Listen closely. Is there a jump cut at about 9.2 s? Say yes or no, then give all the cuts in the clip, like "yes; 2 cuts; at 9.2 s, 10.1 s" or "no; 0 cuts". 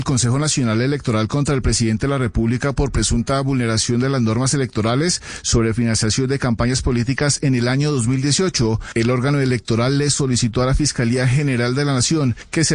no; 0 cuts